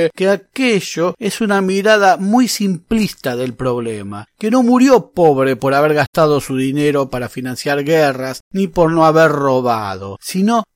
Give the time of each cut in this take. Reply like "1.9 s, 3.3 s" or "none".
none